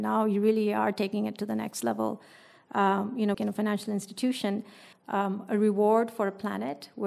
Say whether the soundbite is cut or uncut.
cut